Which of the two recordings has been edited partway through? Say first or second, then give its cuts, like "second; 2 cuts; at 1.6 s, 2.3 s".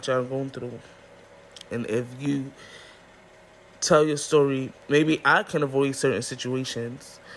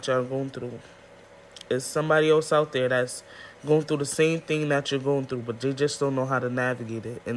first; 2 cuts; at 1.7 s, 4.7 s